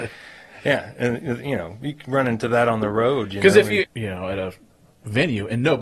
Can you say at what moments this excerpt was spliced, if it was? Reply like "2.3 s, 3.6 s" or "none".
3.8 s